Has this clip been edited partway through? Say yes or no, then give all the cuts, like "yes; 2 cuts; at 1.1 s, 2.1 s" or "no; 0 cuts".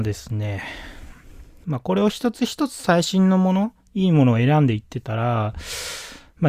yes; 1 cut; at 1.6 s